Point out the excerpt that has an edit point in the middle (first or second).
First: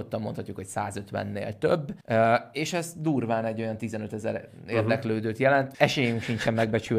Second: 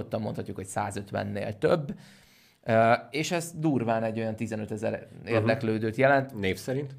first